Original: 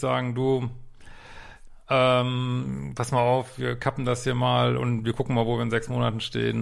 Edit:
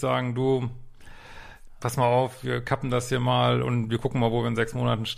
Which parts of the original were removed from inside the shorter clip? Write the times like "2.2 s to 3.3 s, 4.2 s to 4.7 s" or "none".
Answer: 1.8 s to 2.9 s